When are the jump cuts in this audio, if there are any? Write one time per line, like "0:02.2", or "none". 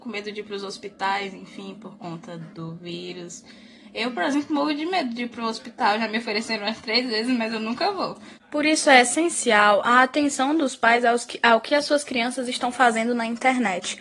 0:08.4